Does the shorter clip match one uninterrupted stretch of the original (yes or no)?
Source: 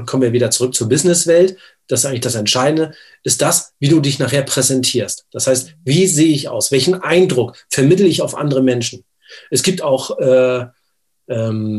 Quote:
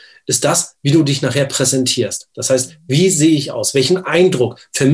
yes